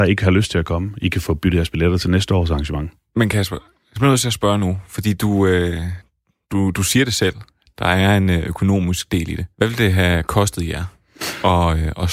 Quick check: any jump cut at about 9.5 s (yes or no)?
yes